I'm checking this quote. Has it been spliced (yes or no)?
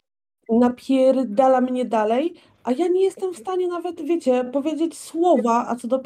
no